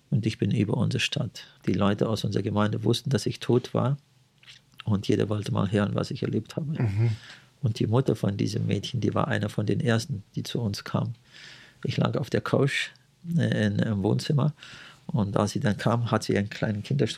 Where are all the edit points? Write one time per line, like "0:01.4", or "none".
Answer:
0:01.6